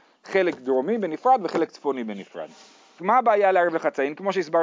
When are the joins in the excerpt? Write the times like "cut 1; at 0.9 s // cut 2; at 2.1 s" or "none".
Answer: cut 1; at 3.0 s